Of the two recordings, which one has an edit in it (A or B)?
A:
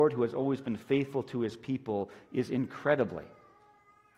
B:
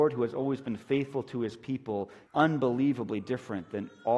B